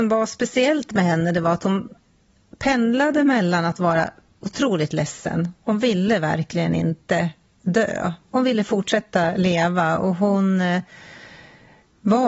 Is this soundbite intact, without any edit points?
yes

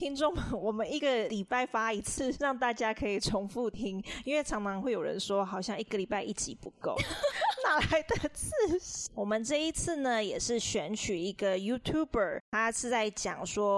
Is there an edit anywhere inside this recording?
yes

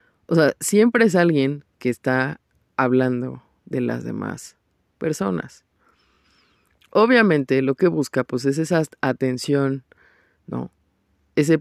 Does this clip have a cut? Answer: no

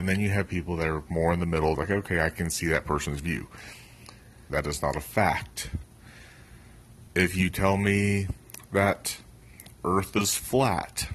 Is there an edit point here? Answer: yes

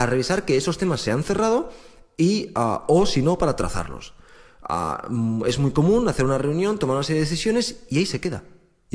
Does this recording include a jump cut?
no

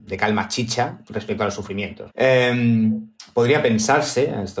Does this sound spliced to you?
yes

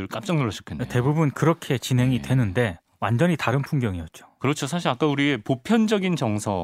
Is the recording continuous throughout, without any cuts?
yes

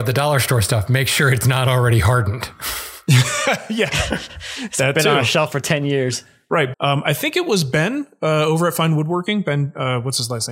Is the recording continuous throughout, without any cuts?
no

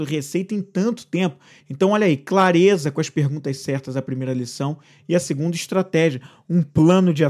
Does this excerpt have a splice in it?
yes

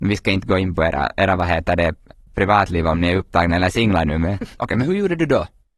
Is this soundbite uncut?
no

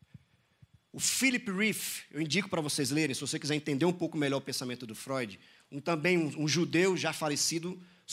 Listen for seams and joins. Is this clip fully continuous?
yes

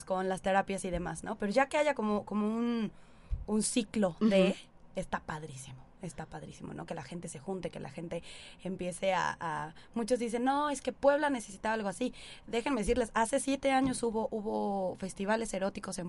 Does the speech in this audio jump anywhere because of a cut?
no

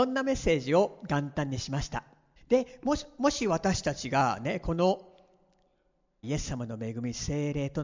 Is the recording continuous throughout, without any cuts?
no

